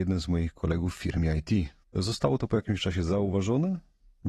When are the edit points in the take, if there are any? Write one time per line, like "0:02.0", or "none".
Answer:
0:01.8

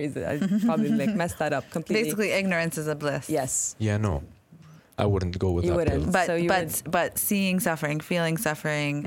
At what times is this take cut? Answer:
none

